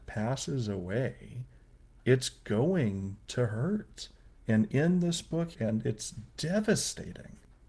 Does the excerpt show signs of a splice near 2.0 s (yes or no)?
no